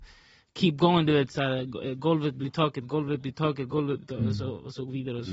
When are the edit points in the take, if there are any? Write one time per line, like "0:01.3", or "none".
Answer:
none